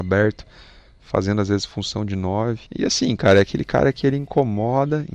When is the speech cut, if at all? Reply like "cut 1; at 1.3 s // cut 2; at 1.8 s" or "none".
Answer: cut 1; at 2.7 s